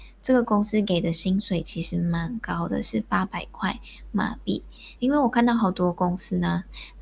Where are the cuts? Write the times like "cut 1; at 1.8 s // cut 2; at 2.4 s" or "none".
cut 1; at 5.0 s